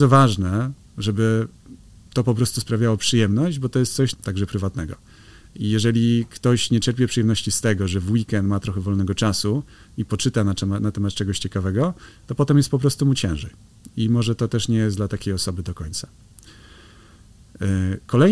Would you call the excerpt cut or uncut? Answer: cut